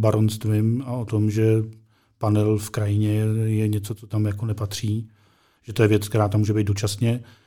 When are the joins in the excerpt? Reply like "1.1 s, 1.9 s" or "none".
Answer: 5.6 s

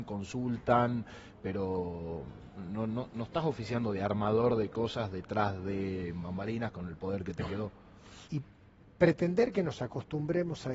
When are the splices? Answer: 8.3 s

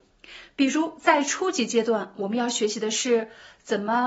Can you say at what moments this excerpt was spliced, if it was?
none

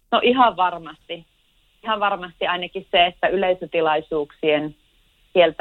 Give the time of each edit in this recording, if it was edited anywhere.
none

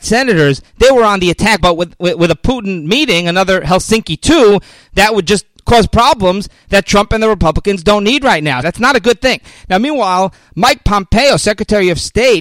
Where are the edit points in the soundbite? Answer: 1.6 s, 8.6 s

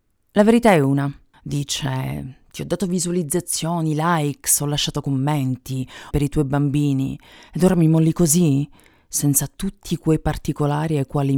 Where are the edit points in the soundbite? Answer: 1.3 s, 6.1 s

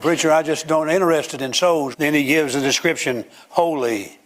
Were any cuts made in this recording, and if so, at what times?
1.9 s

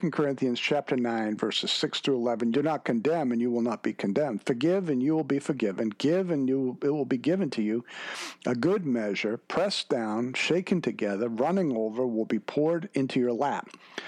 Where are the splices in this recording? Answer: 2.5 s

